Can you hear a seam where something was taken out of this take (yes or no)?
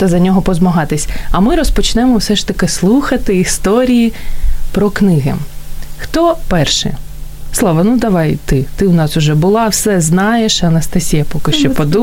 no